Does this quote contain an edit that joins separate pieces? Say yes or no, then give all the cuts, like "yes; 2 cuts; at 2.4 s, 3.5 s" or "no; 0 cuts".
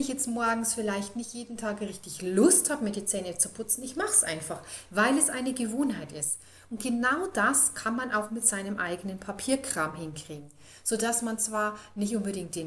no; 0 cuts